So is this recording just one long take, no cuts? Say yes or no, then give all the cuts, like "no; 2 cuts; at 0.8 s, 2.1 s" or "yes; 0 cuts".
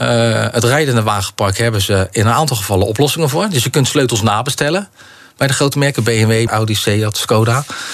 no; 1 cut; at 6.5 s